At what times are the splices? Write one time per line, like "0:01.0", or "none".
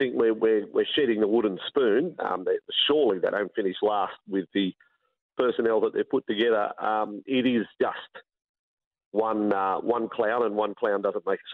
0:02.2